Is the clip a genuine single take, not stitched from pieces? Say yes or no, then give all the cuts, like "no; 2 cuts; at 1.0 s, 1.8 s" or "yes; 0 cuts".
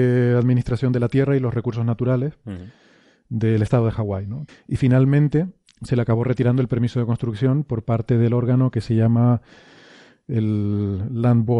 no; 1 cut; at 4.5 s